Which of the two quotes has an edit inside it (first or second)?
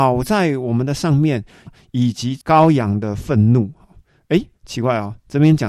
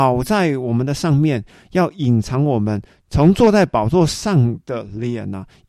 first